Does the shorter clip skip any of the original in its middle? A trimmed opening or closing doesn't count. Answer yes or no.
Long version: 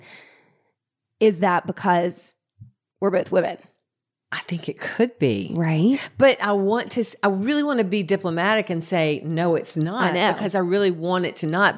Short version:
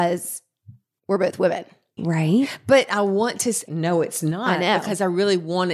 yes